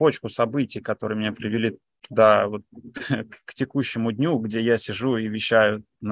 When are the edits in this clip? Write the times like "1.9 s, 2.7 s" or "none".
none